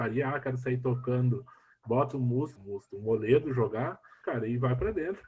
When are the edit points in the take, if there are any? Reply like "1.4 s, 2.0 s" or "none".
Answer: 2.6 s, 4.2 s